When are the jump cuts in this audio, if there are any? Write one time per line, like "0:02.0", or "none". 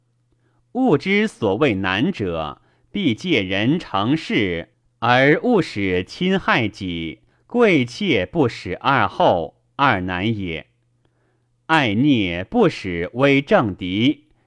0:07.3

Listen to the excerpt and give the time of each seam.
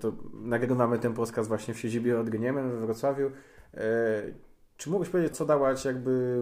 0:05.3

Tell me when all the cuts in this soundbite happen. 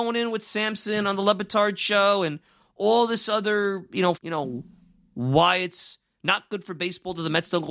0:04.1

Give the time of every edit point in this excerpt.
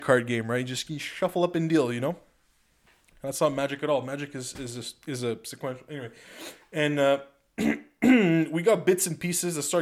none

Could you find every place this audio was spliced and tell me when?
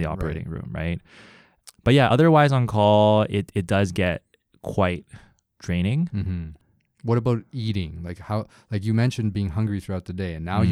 none

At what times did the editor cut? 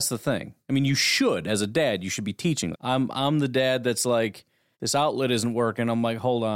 0:02.7
0:04.7

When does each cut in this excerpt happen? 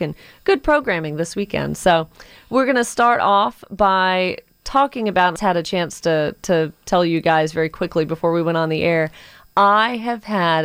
0:05.4

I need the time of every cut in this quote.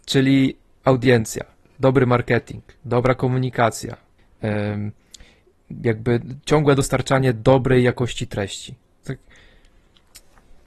0:09.0

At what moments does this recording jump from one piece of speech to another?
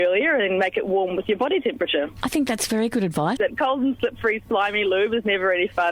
0:03.4

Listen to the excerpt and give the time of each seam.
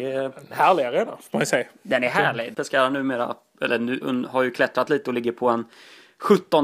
0:02.5
0:04.0

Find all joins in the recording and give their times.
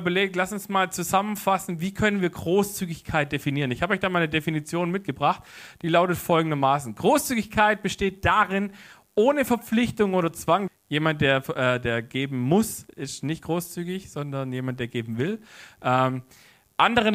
0:10.7

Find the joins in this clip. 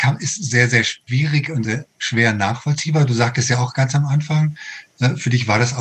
0:01.6

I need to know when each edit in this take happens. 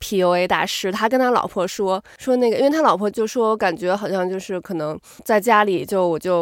0:03.1
0:05.2

